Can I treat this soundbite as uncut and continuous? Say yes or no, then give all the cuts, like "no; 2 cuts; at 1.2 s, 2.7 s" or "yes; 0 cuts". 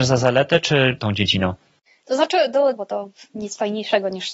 no; 2 cuts; at 1.0 s, 2.7 s